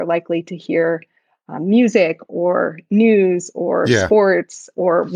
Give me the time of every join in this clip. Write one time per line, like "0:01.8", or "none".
none